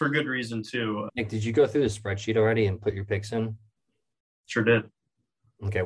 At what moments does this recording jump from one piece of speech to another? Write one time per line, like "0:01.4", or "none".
0:01.1